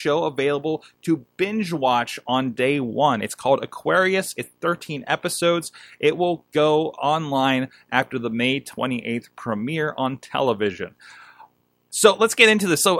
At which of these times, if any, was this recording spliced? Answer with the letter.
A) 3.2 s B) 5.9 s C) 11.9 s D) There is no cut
C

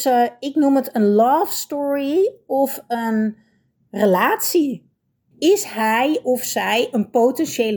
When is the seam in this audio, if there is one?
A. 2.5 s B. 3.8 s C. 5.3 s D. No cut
C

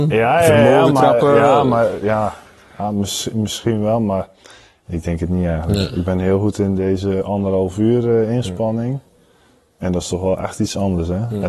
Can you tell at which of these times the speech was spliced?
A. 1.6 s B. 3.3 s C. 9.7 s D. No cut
D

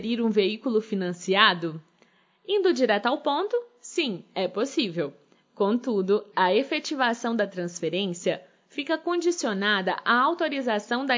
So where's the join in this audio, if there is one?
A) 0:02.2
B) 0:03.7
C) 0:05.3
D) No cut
D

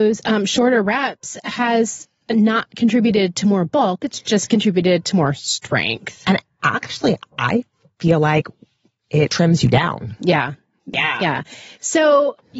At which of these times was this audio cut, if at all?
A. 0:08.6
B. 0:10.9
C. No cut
B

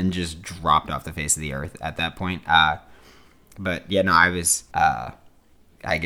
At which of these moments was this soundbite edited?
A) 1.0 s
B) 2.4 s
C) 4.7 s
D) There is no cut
C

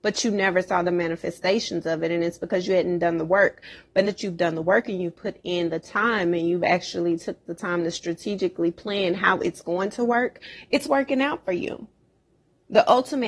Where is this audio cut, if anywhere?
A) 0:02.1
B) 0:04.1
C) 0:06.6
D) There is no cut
B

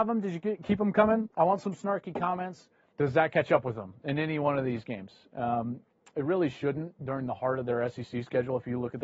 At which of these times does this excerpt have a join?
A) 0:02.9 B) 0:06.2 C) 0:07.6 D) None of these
A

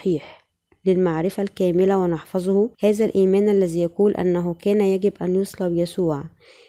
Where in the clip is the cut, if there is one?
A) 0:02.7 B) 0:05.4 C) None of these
A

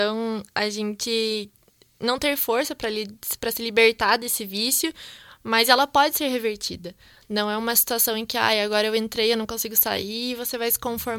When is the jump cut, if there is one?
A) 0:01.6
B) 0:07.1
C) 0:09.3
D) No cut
D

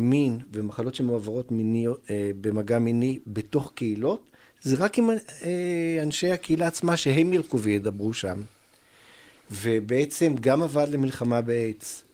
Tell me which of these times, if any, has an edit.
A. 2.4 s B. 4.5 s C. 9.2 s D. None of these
D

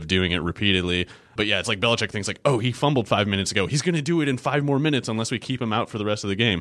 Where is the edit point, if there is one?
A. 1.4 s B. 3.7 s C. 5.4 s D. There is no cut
A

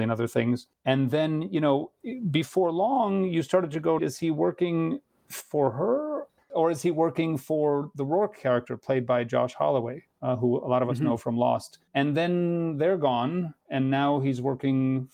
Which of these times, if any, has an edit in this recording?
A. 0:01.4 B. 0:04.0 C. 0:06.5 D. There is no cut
B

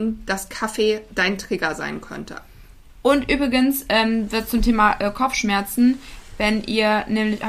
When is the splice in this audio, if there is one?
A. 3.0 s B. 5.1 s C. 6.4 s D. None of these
A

